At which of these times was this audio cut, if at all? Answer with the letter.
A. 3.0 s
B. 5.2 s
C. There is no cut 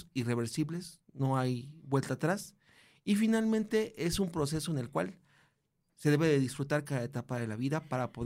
C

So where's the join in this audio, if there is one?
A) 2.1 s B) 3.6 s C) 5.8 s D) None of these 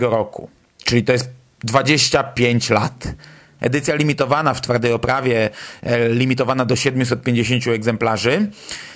B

